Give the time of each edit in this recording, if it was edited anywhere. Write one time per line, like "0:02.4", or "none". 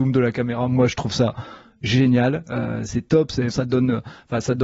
0:03.5